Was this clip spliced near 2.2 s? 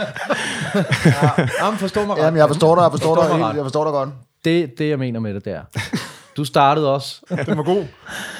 no; 2 cuts; at 4.7 s, 7.3 s

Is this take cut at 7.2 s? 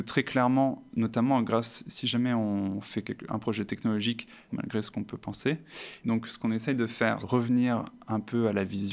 yes; 3 cuts; at 4.5 s, 6.0 s, 7.2 s

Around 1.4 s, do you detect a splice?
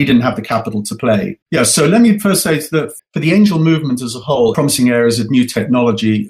yes; 3 cuts; at 1.4 s, 3.0 s, 4.5 s

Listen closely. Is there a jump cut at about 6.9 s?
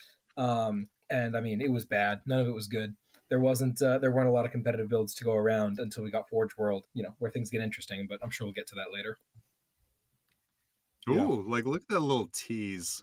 yes; 1 cut; at 6.9 s

